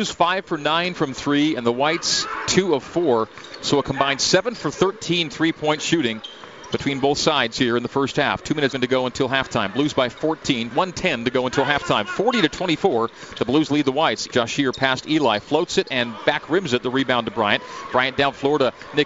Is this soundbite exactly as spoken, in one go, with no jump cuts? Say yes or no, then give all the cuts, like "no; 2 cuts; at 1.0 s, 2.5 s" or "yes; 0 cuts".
no; 3 cuts; at 8.7 s, 10.7 s, 14.3 s